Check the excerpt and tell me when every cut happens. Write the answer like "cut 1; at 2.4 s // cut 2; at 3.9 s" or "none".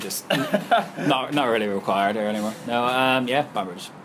none